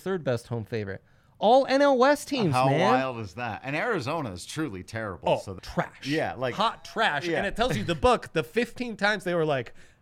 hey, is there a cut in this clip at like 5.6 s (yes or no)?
yes